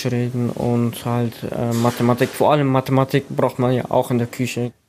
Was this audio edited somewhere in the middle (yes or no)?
no